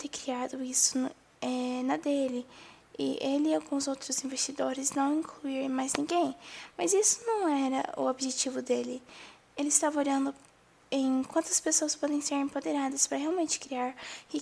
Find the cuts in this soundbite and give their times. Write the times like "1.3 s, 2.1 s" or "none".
none